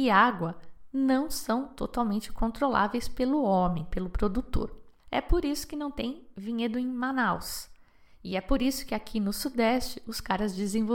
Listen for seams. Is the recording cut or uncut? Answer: cut